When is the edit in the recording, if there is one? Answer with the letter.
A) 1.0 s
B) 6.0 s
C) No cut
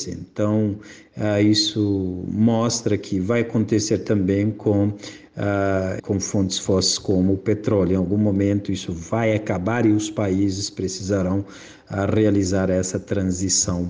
B